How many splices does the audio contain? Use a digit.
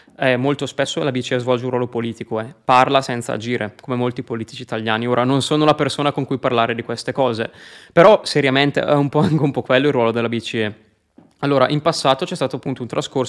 0